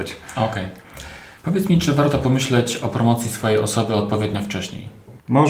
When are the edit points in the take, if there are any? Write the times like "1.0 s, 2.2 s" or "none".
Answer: 1.4 s